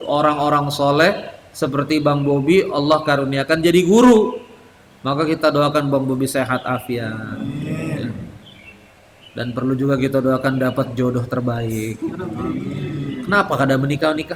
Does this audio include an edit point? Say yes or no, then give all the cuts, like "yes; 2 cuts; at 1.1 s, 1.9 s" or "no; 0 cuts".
no; 0 cuts